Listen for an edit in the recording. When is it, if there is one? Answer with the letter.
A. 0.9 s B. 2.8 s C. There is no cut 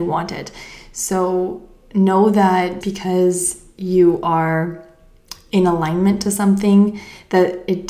B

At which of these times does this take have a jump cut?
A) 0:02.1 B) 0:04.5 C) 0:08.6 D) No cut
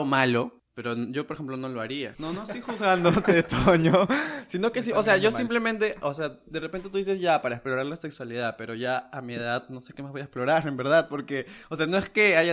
A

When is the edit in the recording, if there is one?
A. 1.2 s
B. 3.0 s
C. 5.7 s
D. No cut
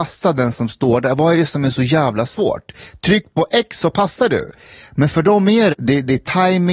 C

